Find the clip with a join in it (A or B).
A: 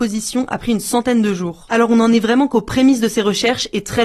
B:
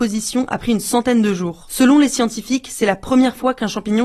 A